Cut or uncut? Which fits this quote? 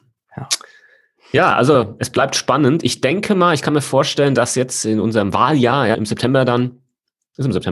cut